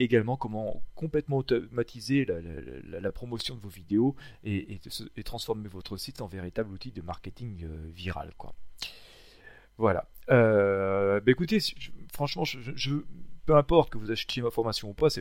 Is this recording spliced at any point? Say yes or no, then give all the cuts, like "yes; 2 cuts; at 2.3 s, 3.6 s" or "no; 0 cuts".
no; 0 cuts